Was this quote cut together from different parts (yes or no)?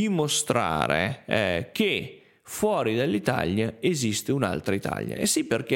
no